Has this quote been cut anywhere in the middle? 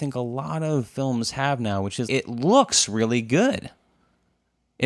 yes; 1 cut; at 2.1 s

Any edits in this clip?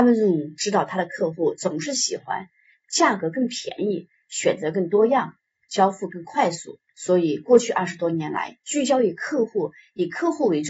yes; 1 cut; at 6.9 s

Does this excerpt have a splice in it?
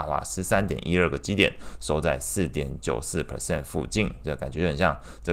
no; 0 cuts

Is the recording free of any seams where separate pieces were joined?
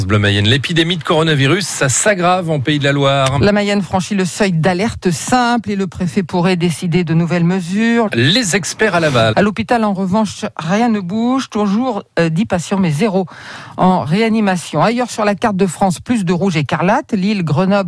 no; 2 cuts; at 8.1 s, 9.3 s

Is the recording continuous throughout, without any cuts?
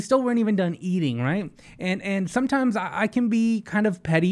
yes; 0 cuts

